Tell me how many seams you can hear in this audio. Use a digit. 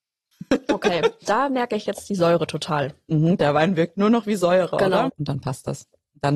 2